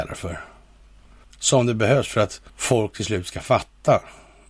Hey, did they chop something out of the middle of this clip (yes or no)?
yes